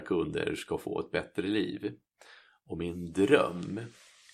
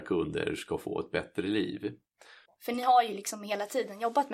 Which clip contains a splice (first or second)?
second